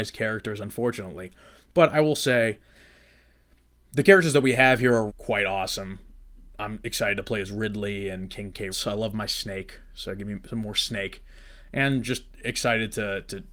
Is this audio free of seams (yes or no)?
no